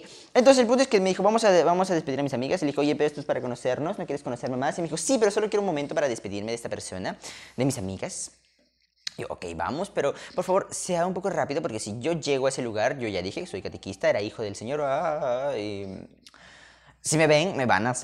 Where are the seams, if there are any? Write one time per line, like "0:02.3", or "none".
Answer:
none